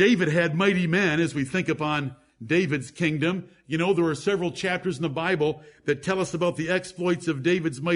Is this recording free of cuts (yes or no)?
yes